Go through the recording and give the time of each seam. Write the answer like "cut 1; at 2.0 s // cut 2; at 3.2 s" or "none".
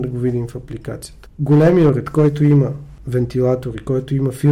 none